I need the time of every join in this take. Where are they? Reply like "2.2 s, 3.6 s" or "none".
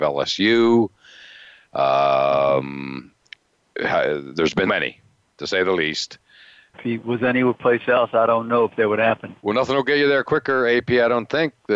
4.7 s, 6.7 s, 9.4 s